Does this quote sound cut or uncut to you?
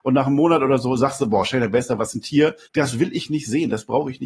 cut